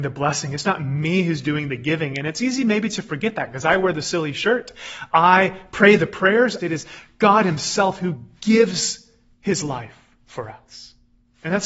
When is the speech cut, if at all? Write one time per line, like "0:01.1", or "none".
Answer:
0:06.6